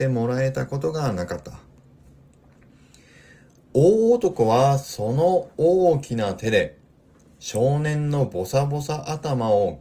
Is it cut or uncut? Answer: uncut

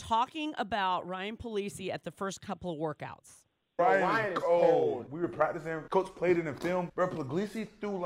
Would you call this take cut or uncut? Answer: uncut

